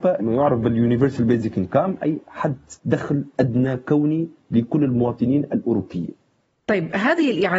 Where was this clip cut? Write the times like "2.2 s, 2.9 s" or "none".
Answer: 2.8 s